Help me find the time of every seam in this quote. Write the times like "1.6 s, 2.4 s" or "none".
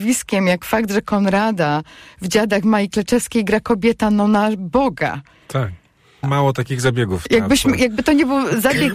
6.2 s